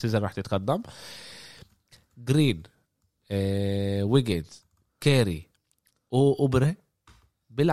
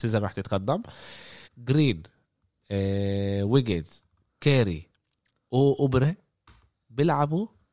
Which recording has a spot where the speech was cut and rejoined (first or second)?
second